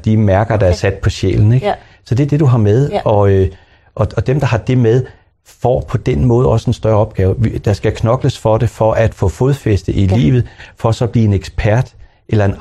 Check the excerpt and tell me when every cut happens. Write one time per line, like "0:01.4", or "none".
none